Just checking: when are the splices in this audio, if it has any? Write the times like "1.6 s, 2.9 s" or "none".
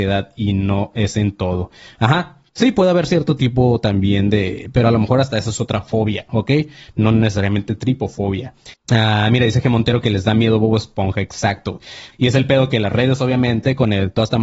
8.7 s, 12.1 s